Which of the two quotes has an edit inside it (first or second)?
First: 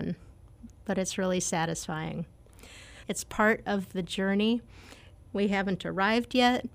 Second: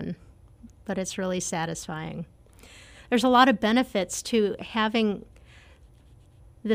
first